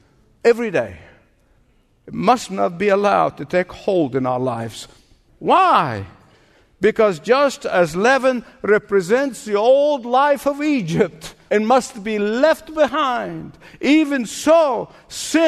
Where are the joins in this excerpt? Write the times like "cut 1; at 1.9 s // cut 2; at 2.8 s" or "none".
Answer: cut 1; at 5.3 s